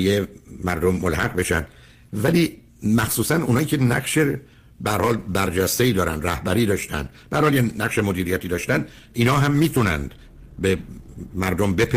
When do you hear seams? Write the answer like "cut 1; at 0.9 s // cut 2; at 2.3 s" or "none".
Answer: none